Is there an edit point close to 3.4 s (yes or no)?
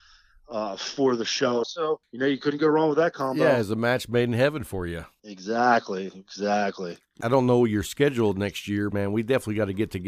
no